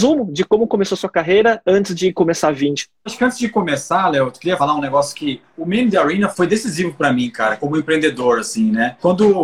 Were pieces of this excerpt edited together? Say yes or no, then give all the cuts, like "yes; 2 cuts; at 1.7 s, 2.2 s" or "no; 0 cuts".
no; 0 cuts